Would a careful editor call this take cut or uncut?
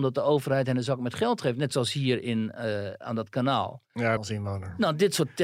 cut